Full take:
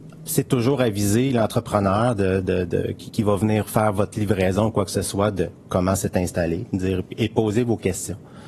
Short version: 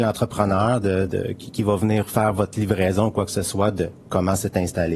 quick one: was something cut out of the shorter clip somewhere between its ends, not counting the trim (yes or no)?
yes